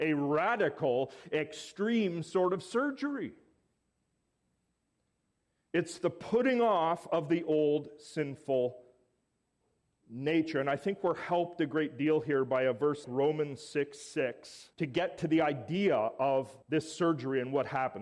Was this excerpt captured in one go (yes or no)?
no